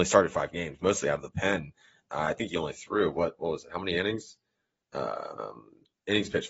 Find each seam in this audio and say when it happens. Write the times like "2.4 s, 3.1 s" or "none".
none